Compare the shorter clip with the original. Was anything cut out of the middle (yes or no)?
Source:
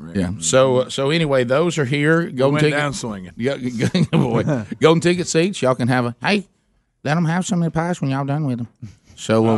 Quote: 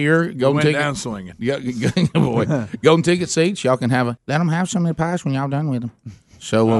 yes